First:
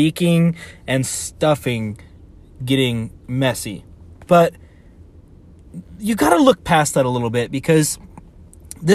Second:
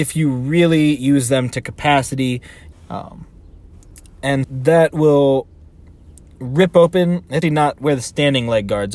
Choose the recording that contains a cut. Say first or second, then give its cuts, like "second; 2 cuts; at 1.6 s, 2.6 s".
second; 3 cuts; at 2.7 s, 4.4 s, 7.4 s